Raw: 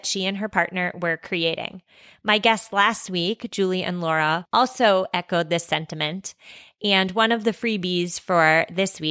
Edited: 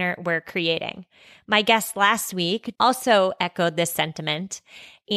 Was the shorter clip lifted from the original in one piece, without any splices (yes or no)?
no